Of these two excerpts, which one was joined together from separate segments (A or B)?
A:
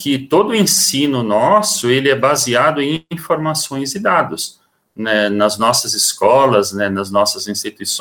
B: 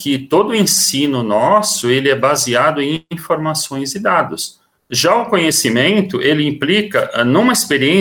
B